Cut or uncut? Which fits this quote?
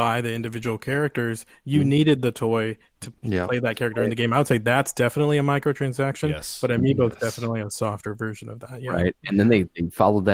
uncut